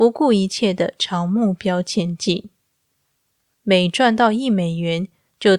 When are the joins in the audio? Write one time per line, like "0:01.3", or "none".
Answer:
0:03.5